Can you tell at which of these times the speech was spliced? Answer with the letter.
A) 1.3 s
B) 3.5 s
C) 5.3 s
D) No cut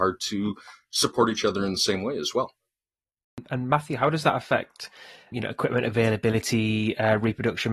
C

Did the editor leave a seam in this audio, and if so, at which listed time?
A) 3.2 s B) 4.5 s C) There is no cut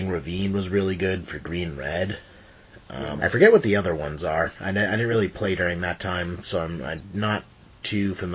A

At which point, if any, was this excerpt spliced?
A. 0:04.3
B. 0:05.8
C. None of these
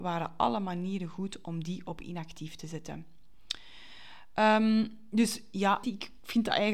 B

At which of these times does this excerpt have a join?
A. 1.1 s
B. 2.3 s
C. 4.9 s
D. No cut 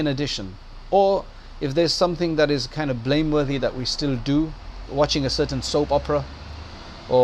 C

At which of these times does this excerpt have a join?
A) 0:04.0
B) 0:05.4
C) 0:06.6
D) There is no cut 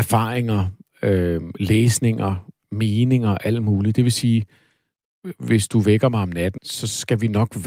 C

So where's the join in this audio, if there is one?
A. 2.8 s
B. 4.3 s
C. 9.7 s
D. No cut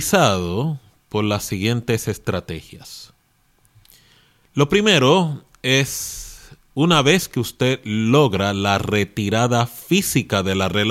D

